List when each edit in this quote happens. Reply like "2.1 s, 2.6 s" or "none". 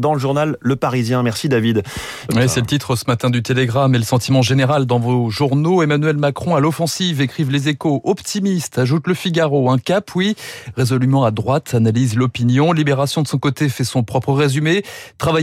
2.3 s